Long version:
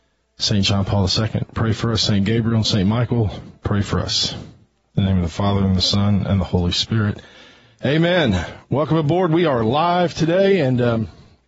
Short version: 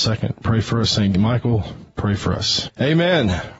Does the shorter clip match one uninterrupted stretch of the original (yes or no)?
no